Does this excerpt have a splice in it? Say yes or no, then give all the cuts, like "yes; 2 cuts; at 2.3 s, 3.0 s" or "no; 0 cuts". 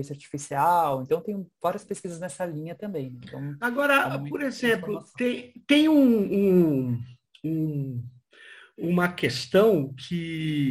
no; 0 cuts